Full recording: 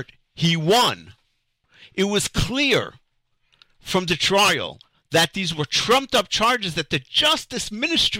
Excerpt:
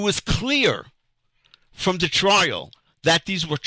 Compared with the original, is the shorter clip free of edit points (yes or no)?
yes